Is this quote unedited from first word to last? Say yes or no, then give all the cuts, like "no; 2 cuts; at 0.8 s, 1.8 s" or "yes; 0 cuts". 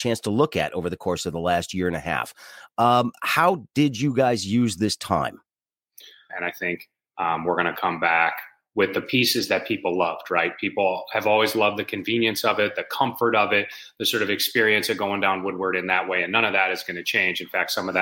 no; 1 cut; at 6.3 s